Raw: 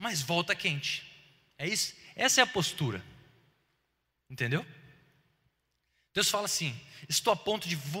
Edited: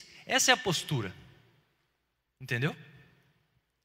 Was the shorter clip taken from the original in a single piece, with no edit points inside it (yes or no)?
yes